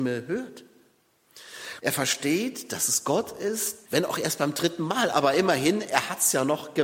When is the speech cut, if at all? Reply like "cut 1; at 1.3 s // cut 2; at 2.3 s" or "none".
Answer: cut 1; at 1.8 s // cut 2; at 3.9 s